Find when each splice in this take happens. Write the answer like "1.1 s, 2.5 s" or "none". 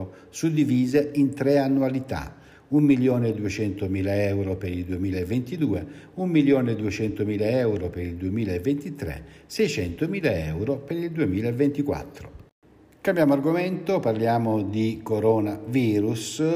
none